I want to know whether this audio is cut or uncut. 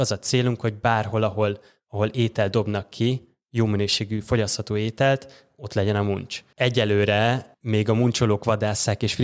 cut